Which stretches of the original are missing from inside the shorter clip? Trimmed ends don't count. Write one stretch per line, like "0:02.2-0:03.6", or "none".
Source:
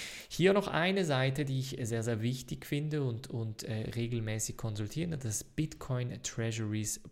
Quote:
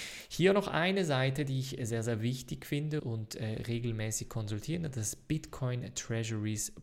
0:03.0-0:03.3